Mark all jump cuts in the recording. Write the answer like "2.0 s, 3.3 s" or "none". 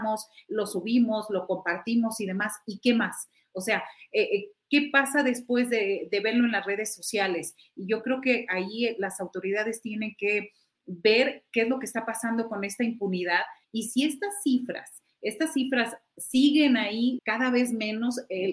13.6 s, 17.2 s